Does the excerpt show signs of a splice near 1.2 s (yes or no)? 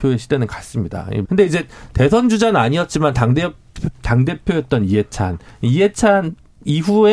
yes